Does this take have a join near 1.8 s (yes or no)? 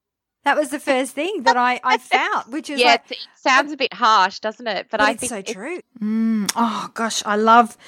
no